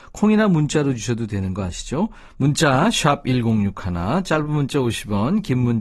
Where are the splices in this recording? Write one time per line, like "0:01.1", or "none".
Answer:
none